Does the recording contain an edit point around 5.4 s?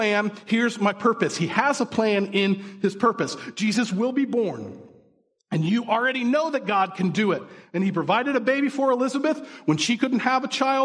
no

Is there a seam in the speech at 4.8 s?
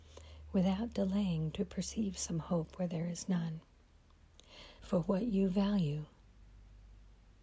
yes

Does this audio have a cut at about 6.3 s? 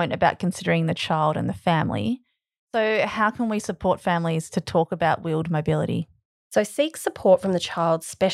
yes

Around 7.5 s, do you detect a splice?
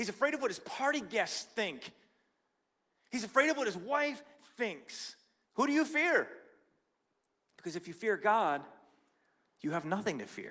no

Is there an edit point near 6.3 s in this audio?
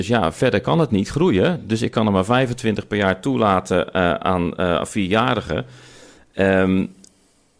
no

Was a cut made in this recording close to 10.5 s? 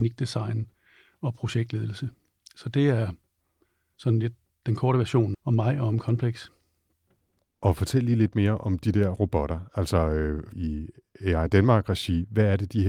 yes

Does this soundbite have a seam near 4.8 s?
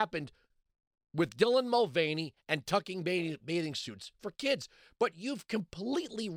no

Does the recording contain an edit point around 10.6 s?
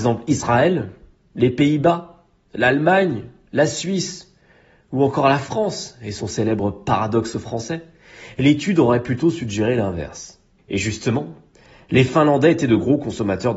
yes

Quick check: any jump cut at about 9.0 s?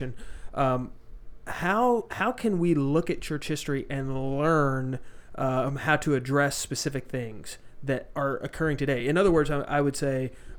no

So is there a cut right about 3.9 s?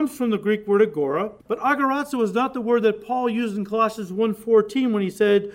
no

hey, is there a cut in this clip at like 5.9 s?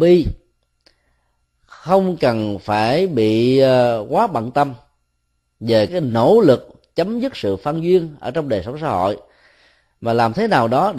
yes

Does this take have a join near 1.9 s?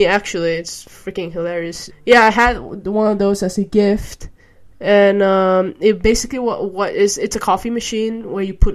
yes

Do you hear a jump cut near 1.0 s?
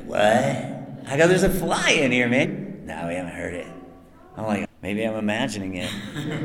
no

